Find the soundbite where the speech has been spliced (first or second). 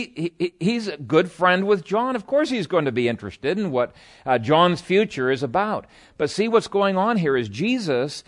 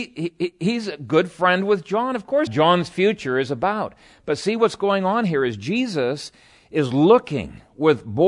second